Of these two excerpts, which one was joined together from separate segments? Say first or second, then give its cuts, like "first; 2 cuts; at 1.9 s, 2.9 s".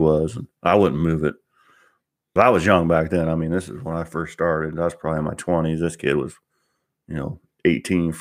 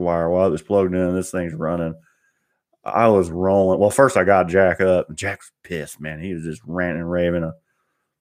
first; 1 cut; at 2.4 s